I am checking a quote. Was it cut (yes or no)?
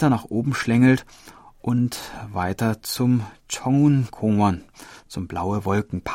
no